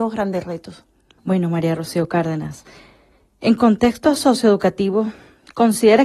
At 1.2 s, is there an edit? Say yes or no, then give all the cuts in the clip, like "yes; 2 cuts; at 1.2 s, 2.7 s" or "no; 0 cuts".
yes; 1 cut; at 1.2 s